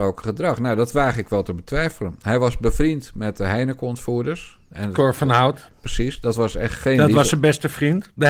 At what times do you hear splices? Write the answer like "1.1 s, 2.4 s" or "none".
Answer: none